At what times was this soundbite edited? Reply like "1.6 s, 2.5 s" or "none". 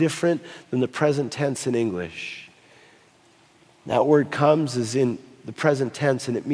none